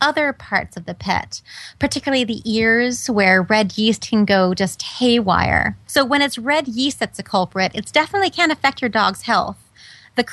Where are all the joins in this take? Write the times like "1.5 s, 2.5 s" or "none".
5.9 s